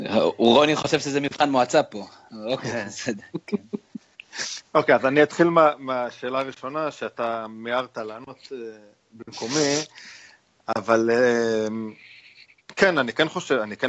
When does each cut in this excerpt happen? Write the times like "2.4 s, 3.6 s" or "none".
none